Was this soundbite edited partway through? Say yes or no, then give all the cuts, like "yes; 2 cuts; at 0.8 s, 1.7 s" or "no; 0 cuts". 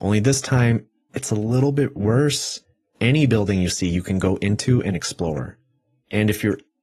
yes; 1 cut; at 2.8 s